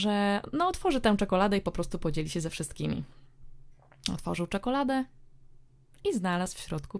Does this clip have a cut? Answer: no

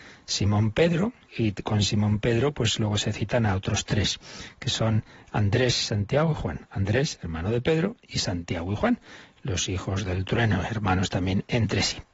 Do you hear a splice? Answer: yes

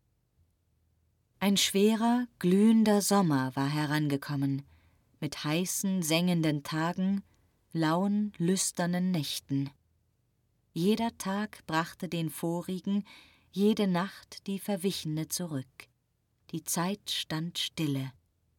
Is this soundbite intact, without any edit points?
yes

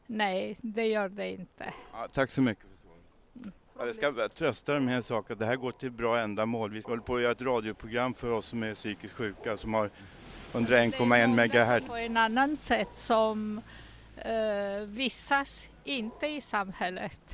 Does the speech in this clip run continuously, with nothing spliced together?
no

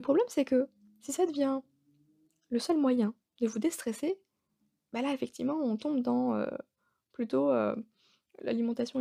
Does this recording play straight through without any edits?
yes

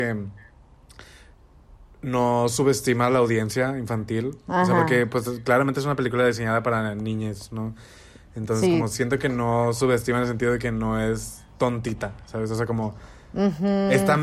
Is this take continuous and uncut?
yes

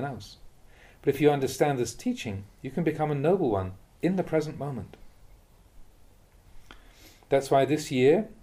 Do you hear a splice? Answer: no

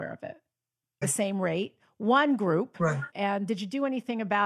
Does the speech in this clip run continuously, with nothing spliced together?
no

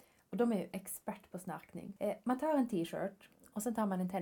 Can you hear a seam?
yes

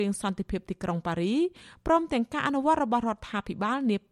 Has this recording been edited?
no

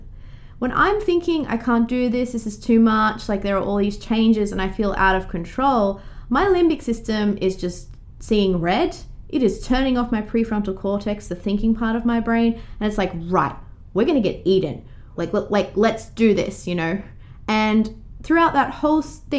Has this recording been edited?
yes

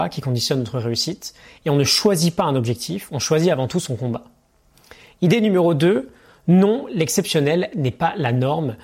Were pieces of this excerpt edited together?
no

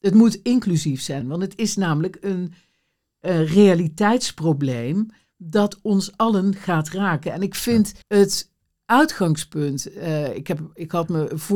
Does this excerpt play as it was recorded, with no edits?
no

